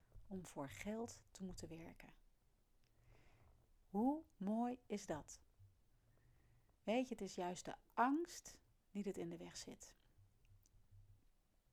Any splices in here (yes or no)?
yes